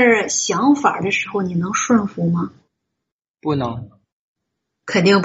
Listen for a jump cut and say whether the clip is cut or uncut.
uncut